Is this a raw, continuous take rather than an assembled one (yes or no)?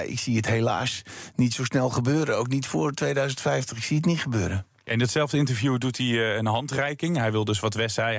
yes